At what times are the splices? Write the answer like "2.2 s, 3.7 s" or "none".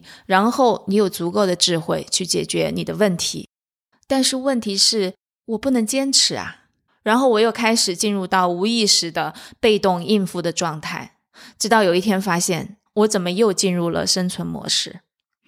3.9 s, 6.9 s, 12.9 s